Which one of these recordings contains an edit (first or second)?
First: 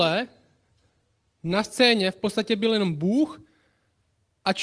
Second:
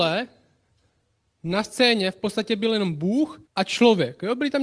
second